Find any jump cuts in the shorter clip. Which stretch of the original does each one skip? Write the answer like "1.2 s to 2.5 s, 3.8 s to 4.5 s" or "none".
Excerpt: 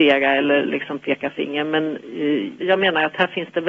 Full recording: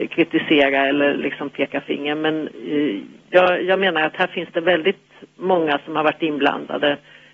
3.1 s to 3.6 s